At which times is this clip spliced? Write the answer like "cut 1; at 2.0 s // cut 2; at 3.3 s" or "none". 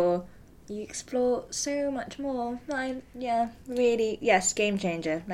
none